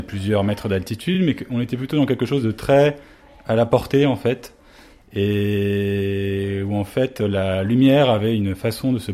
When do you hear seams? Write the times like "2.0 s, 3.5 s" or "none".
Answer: none